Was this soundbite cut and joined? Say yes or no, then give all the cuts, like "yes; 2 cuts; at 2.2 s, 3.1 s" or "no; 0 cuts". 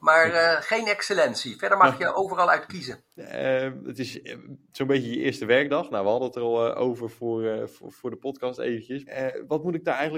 yes; 2 cuts; at 3.2 s, 9.0 s